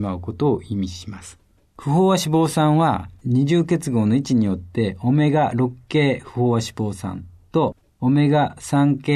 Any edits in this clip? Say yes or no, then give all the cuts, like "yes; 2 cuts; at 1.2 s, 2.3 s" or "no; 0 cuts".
yes; 1 cut; at 1.6 s